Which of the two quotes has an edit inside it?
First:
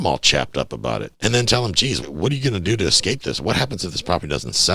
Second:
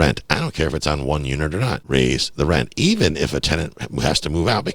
first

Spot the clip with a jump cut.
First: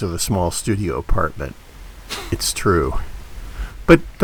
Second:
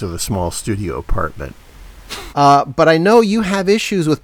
second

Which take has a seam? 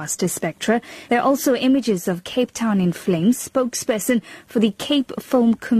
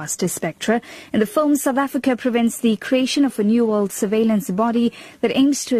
first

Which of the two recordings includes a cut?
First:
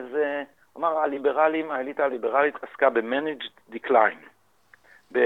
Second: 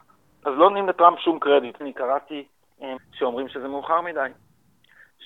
second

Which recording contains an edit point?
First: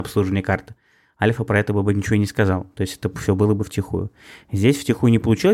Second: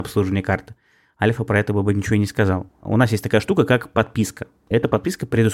second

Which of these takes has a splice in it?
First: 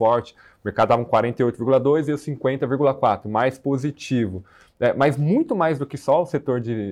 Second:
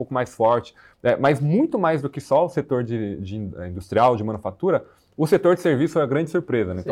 second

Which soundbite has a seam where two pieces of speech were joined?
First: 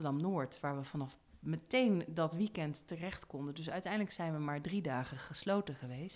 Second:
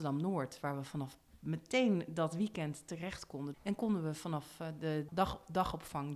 second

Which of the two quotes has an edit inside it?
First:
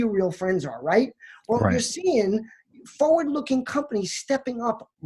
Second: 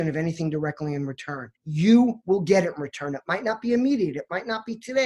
second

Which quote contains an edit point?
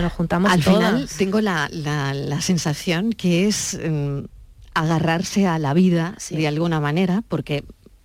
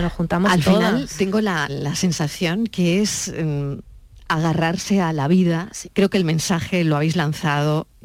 second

